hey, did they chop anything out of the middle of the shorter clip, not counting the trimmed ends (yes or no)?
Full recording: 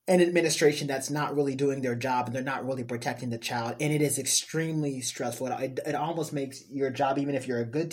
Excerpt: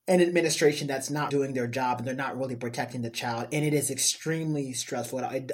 yes